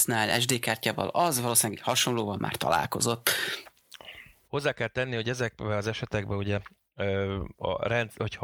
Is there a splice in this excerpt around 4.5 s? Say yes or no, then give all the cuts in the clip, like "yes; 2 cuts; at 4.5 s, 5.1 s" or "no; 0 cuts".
yes; 1 cut; at 4.5 s